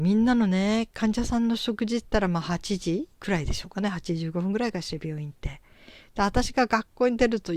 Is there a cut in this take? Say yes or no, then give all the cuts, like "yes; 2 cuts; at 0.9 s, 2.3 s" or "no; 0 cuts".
yes; 1 cut; at 3.1 s